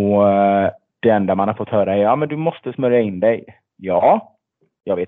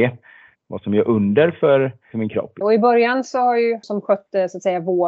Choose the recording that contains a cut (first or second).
second